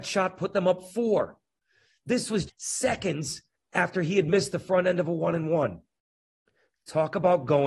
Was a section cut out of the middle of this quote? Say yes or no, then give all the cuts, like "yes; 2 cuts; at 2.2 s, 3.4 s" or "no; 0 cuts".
yes; 1 cut; at 2.5 s